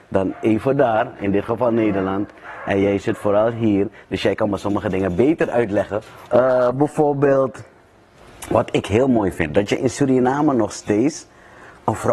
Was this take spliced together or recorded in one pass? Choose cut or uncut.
cut